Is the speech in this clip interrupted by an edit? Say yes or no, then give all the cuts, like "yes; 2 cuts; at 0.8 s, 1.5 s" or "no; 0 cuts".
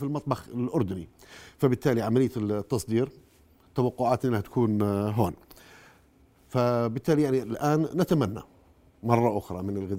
no; 0 cuts